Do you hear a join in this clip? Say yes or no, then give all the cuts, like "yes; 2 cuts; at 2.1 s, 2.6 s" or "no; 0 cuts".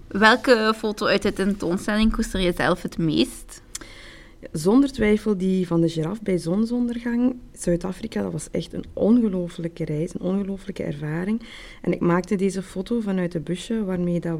no; 0 cuts